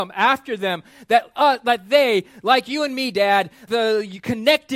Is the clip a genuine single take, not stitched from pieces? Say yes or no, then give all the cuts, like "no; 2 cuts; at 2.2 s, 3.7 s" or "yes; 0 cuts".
no; 1 cut; at 3.7 s